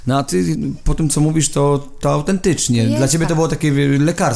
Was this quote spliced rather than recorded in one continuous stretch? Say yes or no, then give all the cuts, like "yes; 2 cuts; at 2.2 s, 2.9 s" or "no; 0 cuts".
no; 0 cuts